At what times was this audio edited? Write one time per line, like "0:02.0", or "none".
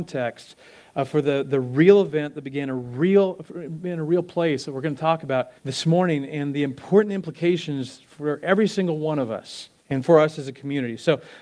0:05.6
0:09.8